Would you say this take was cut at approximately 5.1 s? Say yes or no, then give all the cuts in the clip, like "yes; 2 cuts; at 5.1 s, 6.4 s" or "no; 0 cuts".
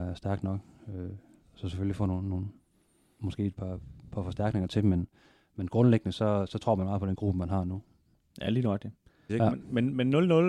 no; 1 cut; at 9.3 s